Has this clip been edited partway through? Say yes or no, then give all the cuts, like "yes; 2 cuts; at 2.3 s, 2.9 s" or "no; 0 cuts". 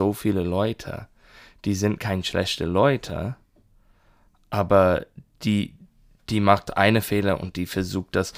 no; 0 cuts